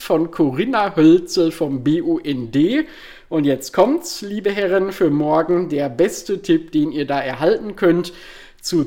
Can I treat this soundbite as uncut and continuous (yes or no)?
yes